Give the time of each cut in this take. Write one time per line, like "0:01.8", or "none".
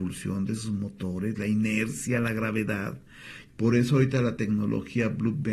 0:03.5